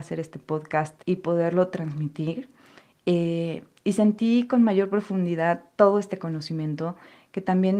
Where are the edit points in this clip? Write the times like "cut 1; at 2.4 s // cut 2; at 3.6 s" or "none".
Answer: cut 1; at 1.0 s